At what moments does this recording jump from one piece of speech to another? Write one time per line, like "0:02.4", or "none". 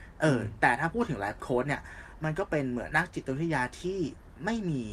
0:02.9